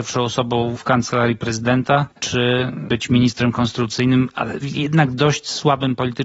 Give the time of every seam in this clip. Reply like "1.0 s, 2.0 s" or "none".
2.1 s